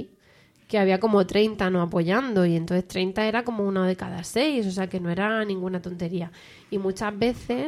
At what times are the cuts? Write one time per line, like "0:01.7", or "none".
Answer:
none

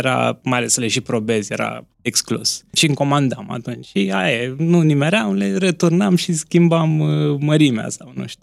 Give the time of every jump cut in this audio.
0:01.9

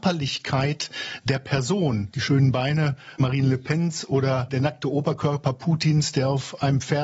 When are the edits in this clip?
0:02.1

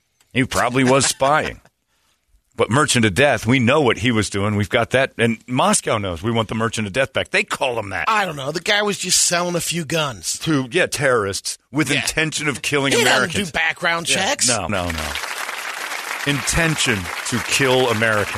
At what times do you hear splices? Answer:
0:14.7

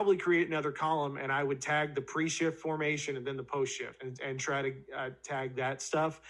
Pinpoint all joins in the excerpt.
none

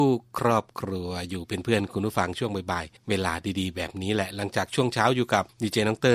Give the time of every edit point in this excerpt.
0:03.0

